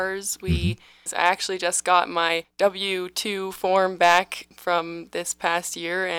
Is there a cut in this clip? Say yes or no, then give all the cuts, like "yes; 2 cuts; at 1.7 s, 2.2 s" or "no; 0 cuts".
yes; 1 cut; at 1.1 s